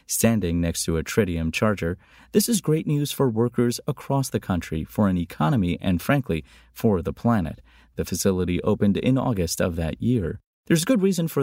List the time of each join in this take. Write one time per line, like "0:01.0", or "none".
none